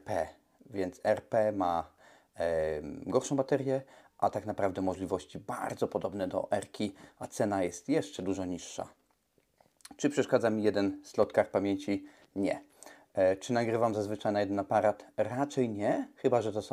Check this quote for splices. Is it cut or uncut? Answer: uncut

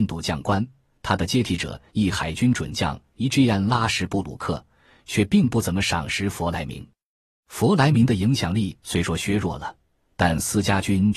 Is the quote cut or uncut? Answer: uncut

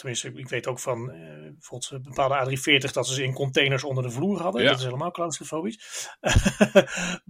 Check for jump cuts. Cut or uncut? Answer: uncut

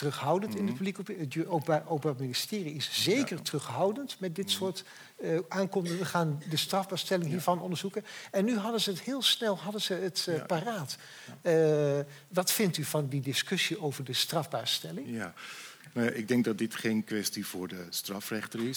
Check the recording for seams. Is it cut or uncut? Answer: uncut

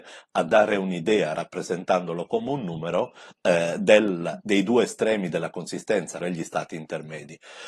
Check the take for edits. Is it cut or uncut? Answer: cut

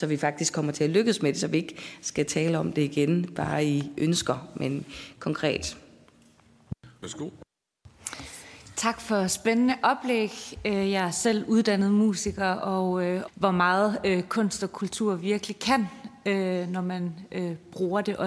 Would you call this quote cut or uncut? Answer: cut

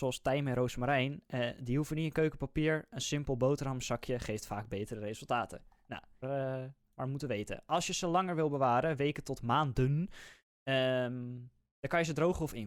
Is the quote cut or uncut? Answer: cut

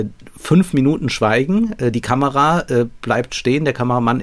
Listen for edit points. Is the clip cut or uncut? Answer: uncut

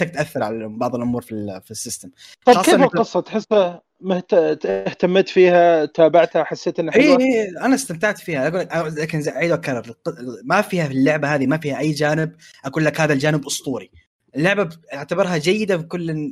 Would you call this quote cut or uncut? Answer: uncut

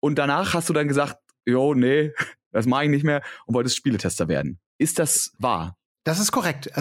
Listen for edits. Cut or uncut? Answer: uncut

